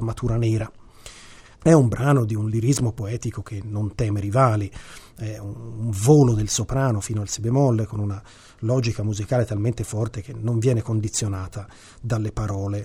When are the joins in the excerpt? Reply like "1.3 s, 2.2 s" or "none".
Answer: 1.5 s

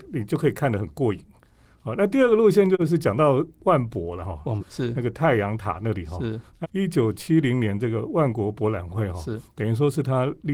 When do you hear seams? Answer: 4.6 s, 6.6 s

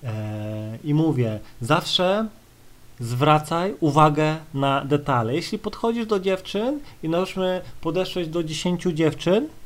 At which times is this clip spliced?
none

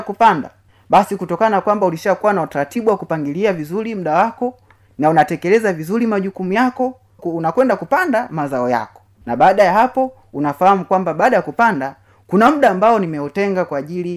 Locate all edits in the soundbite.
7.2 s

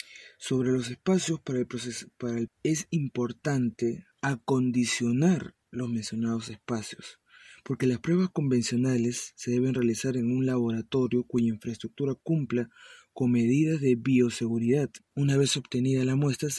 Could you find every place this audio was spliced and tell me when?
2.5 s, 4.1 s, 15.0 s

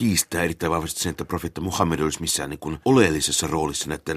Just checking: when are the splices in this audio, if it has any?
2.8 s

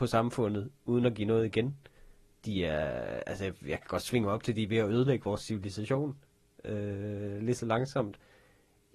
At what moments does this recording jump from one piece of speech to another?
none

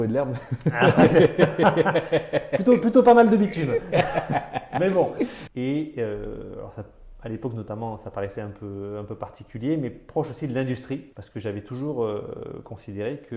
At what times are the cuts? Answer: 5.5 s, 11.1 s

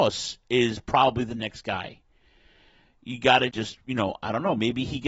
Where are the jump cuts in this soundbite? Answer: 3.5 s

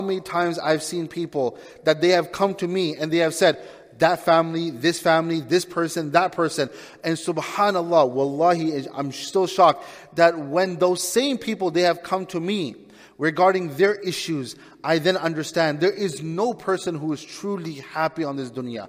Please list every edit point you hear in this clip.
none

